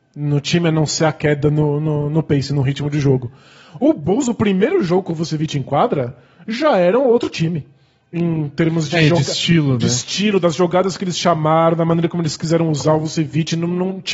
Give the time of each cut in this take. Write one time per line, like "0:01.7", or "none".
none